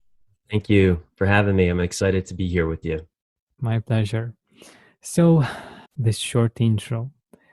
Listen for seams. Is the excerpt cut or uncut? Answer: cut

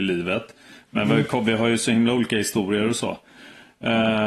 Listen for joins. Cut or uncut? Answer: uncut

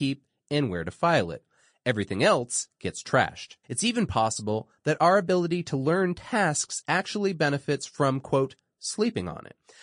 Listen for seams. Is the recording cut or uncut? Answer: cut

